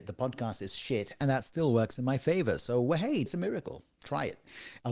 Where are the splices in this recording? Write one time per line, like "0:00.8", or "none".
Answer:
none